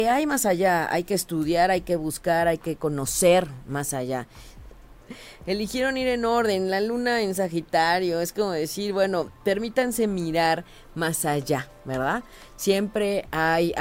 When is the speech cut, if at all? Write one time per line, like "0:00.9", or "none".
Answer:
0:04.7